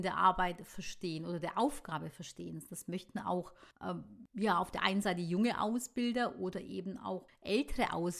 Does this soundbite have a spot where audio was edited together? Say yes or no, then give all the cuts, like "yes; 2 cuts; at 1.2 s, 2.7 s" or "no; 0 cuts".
no; 0 cuts